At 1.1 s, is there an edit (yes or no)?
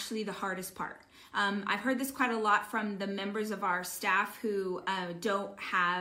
no